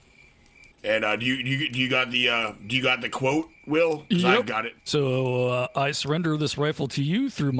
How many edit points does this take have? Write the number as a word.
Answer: one